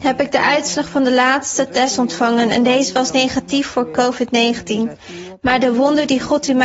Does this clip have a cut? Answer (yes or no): no